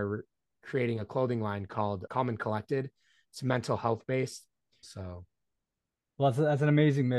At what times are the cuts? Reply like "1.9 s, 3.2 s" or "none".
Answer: 2.1 s, 4.8 s